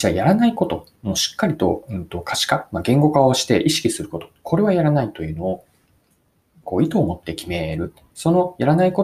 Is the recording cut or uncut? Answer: cut